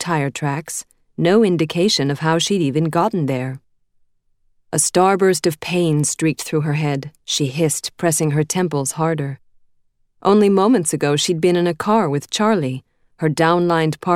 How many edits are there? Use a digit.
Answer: 1